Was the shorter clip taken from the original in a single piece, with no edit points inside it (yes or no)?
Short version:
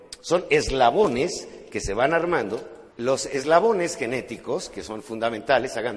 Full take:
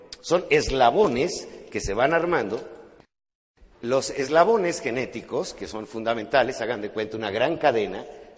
no